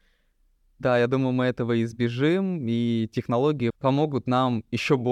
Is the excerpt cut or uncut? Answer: cut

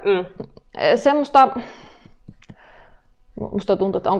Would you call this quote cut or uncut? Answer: uncut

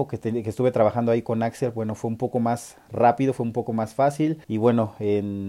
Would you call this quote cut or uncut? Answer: cut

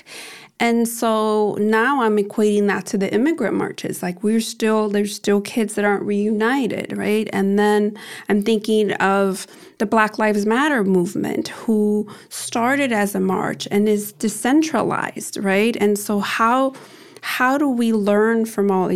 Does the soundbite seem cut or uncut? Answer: uncut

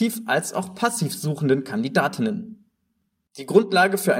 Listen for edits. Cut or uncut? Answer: uncut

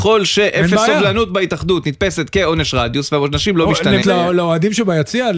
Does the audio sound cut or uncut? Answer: cut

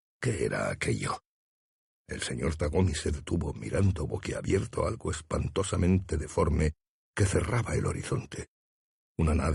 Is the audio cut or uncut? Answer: uncut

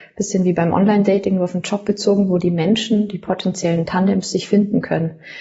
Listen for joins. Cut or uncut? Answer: uncut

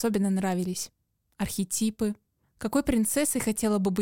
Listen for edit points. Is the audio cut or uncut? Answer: uncut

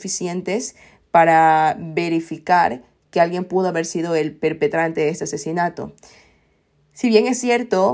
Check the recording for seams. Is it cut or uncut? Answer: uncut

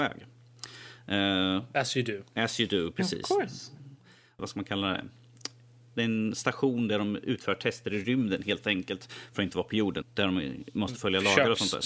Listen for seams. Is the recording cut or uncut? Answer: cut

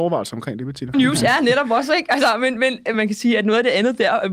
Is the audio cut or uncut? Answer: cut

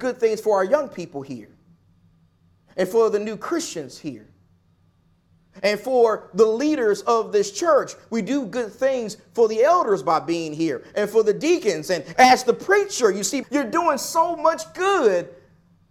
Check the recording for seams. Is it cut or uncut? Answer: cut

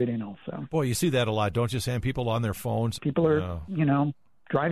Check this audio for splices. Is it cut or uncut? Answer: cut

